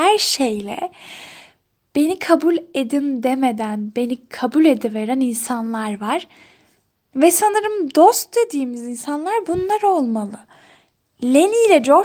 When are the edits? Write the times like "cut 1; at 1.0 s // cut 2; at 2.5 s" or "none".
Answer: none